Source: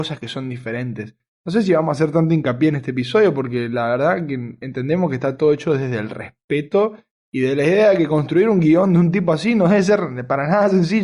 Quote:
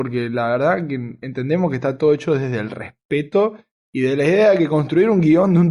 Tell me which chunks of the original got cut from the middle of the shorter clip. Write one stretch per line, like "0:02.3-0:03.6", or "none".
none